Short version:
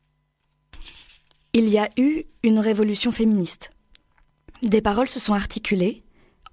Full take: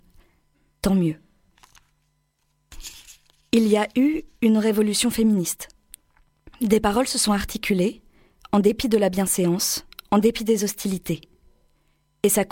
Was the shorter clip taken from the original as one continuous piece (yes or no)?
yes